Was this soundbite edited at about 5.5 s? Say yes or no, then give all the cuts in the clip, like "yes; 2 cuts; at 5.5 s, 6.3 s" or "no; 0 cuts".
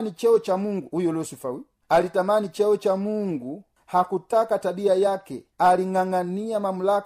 yes; 1 cut; at 5.5 s